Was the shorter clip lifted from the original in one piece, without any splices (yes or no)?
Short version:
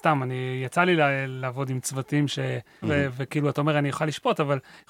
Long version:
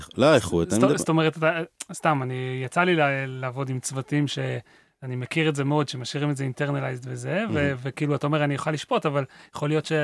no